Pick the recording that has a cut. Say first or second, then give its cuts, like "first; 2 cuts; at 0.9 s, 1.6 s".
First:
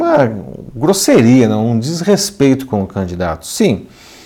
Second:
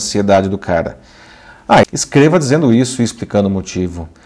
second; 1 cut; at 1.8 s